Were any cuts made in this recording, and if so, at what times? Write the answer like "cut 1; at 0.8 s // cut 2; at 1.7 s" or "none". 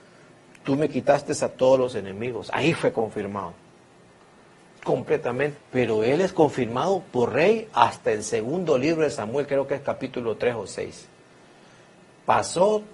cut 1; at 5.6 s